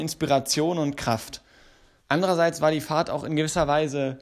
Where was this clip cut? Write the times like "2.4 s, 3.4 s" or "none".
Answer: 2.0 s